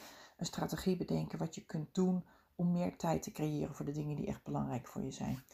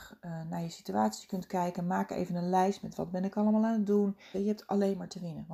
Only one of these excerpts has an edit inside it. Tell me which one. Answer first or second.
second